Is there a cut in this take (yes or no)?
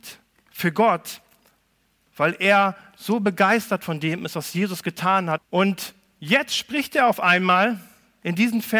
yes